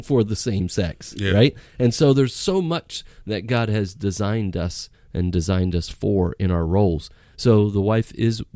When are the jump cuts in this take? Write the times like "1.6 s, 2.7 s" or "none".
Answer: 4.9 s